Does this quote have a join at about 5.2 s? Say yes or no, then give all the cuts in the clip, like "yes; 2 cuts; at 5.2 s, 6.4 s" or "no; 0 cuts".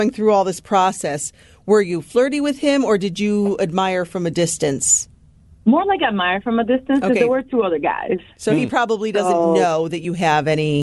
no; 0 cuts